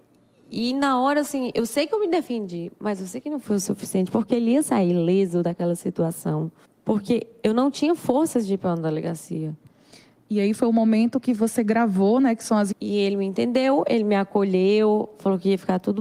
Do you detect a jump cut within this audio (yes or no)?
yes